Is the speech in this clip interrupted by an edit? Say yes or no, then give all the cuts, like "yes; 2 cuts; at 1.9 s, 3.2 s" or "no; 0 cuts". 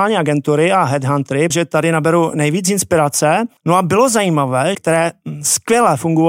yes; 3 cuts; at 1.5 s, 3.6 s, 4.7 s